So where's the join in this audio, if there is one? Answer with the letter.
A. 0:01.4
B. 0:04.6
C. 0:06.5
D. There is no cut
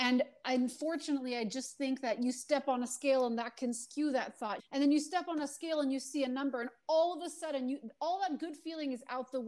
B